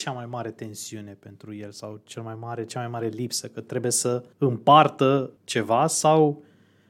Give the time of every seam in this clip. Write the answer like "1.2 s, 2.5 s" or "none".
4.3 s, 5.4 s

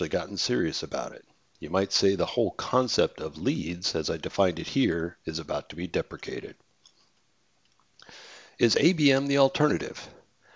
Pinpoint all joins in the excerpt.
none

